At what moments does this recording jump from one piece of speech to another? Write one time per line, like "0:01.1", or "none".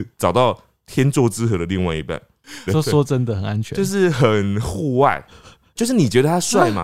0:02.7
0:05.8